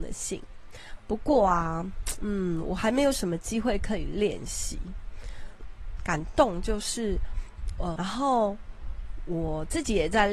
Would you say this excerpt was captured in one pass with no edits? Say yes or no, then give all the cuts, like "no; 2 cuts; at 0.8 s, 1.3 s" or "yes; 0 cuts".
no; 3 cuts; at 1.0 s, 5.6 s, 8.0 s